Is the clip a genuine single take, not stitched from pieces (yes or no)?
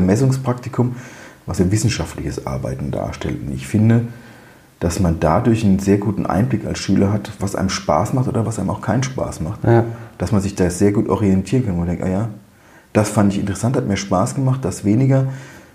no